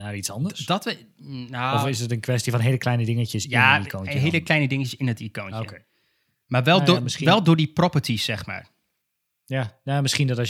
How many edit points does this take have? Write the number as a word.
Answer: zero